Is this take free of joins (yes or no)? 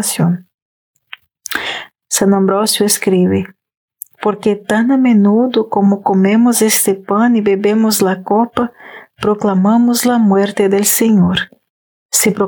no